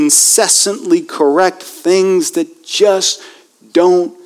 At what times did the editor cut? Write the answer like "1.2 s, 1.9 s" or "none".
none